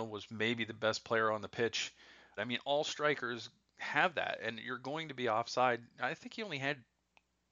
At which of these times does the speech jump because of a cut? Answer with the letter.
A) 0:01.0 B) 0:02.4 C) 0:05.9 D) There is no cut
B